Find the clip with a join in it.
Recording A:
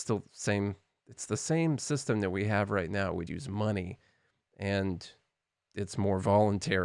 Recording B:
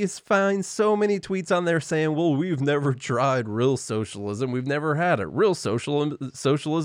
A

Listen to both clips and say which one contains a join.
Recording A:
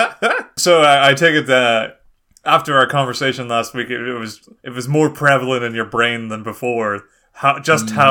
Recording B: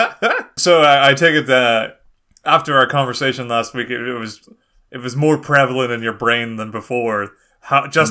A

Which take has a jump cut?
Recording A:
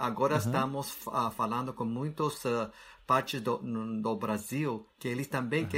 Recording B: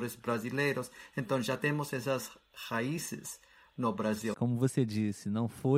B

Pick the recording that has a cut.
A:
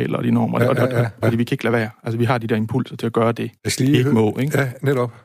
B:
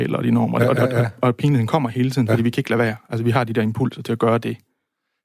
A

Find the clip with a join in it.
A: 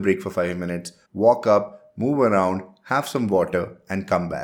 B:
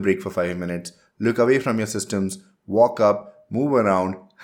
A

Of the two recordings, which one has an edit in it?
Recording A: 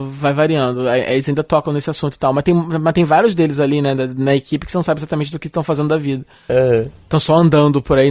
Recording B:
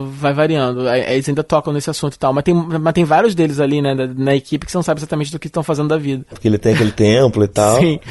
B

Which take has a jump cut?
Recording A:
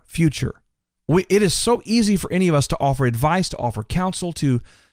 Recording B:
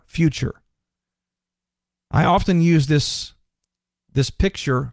A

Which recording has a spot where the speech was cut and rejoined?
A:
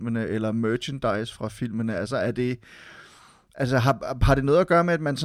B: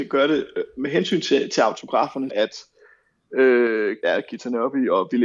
B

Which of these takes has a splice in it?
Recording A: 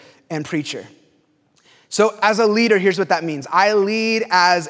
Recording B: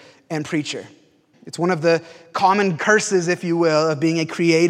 B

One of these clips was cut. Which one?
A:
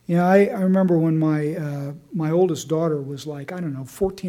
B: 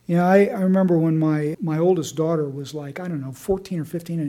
B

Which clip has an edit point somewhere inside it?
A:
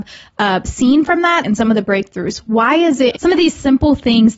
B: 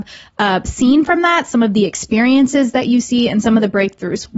A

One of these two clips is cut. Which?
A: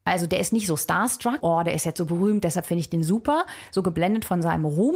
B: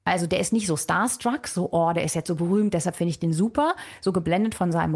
A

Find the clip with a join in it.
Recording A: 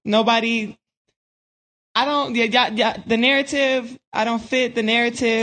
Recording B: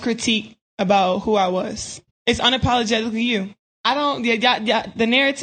B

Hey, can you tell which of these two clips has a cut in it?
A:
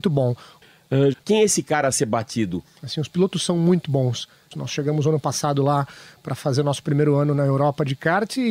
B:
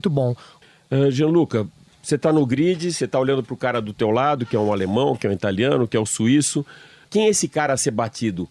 A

